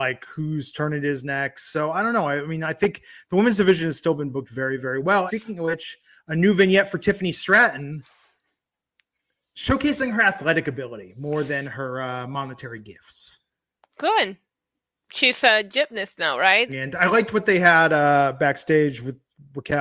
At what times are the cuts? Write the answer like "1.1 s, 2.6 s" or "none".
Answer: 5.3 s, 16.7 s